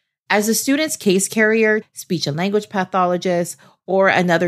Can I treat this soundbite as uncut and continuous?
no; 1 cut; at 1.8 s

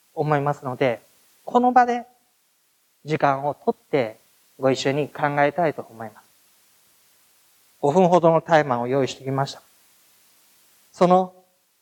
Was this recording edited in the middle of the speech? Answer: no; 0 cuts

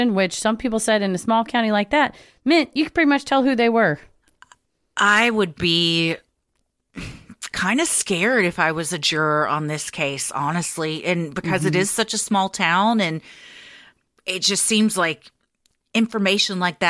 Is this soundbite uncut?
yes; 0 cuts

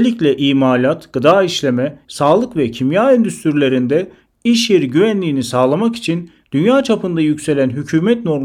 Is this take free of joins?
no; 1 cut; at 2.0 s

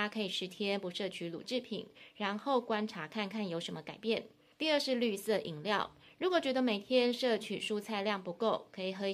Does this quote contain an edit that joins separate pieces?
yes; 1 cut; at 4.5 s

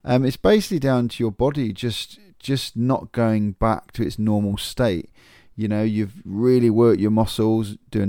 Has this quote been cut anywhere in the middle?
no; 0 cuts

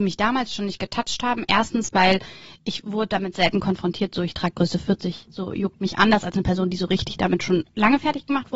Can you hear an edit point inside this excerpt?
no; 0 cuts

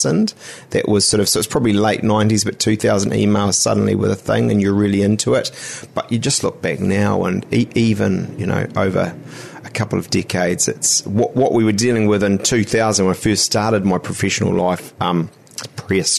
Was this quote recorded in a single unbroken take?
yes; 0 cuts

